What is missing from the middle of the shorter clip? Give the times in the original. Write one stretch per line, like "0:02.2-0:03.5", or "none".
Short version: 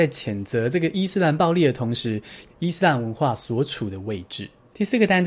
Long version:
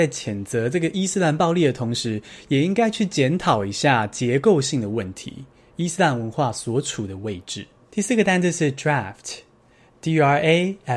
0:02.5-0:05.6